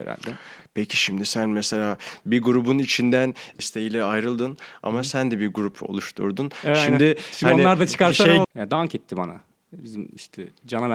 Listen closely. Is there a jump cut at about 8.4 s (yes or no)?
yes